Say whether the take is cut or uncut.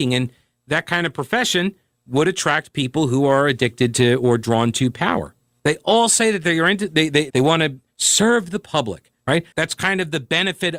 cut